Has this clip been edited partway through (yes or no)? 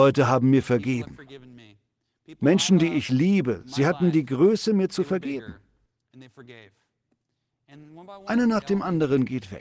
no